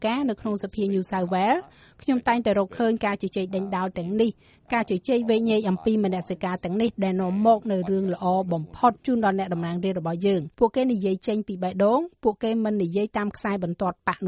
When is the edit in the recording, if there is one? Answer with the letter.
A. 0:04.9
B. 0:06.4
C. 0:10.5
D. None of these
C